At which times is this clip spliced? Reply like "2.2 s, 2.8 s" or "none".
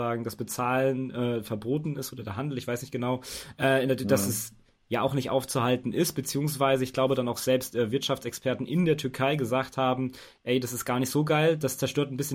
none